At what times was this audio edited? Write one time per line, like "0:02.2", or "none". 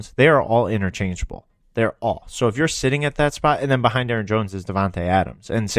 none